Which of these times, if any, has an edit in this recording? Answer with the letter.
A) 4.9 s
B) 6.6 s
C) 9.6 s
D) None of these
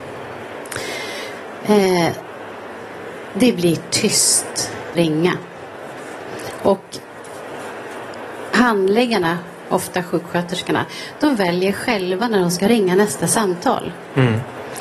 A